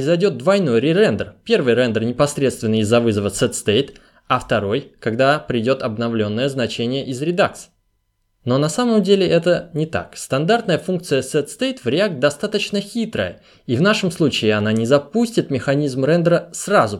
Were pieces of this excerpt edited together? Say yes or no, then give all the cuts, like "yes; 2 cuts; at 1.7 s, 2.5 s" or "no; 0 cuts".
no; 0 cuts